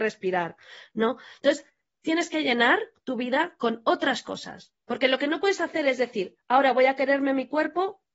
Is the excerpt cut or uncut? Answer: cut